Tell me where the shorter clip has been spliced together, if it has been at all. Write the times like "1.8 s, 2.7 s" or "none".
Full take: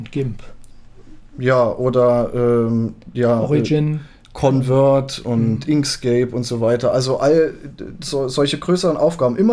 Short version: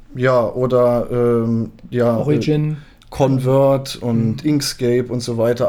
none